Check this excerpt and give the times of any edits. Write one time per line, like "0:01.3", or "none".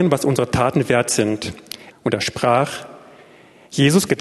0:01.9